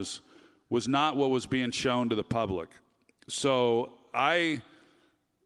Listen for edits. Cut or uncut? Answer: uncut